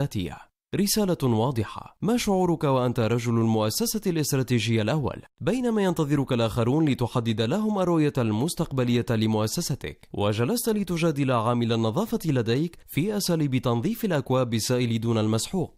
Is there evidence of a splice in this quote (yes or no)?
no